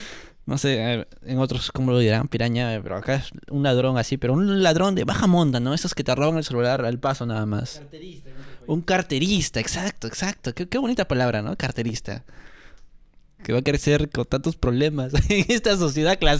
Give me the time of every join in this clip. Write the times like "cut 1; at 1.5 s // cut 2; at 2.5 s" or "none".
cut 1; at 13.4 s